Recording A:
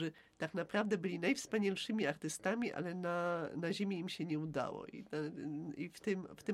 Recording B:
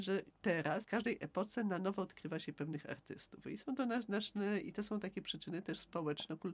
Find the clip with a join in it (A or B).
B